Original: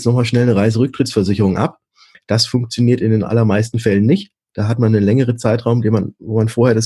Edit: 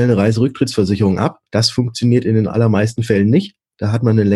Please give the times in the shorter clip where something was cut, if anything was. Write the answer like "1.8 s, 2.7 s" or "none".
1.5 s